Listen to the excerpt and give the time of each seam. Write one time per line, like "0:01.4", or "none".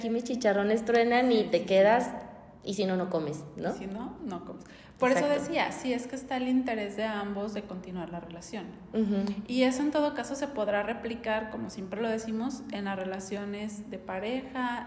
none